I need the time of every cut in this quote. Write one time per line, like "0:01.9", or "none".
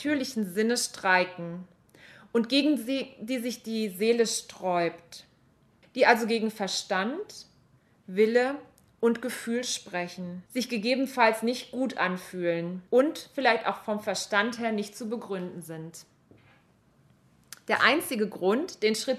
0:05.8
0:10.5
0:12.9